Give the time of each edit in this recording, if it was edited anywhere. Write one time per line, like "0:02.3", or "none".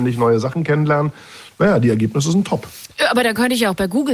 none